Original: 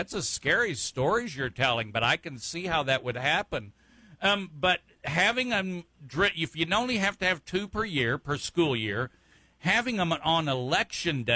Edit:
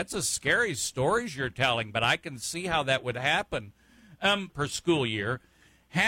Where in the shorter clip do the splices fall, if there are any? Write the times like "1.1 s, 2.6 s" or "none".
4.5 s